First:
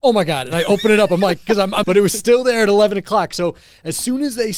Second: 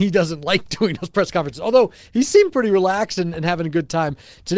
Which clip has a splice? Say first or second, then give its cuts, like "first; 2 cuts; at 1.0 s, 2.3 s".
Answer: first; 1 cut; at 1.8 s